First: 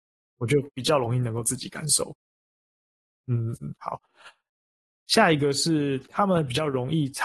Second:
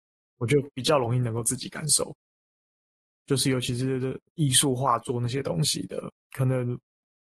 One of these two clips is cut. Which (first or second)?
second